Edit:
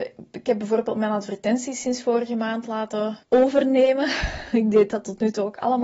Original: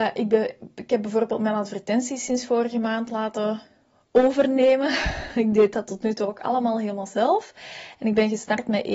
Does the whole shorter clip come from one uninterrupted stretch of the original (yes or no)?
no